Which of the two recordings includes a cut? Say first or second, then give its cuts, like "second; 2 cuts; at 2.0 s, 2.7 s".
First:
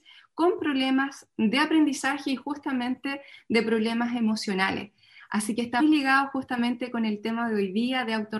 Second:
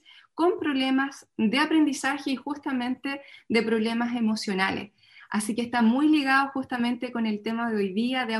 first; 1 cut; at 5.8 s